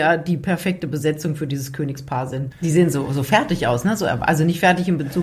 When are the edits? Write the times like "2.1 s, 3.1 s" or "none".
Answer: 2.5 s